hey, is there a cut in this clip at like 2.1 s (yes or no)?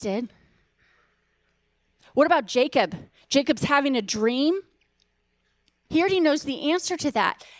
no